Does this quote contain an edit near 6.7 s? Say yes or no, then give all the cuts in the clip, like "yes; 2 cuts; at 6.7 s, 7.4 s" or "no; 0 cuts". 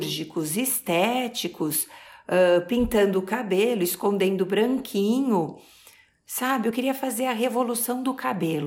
no; 0 cuts